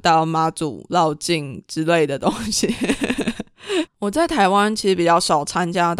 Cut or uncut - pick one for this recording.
cut